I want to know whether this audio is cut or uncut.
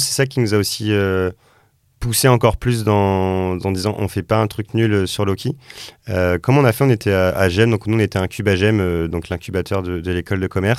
uncut